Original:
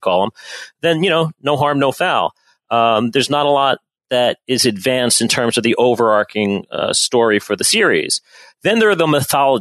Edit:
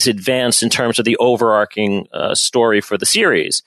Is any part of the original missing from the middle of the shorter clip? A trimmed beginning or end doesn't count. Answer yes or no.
no